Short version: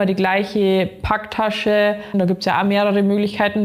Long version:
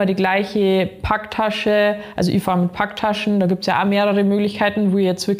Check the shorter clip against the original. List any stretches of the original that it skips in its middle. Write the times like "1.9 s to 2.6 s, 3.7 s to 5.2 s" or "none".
2.1 s to 3.3 s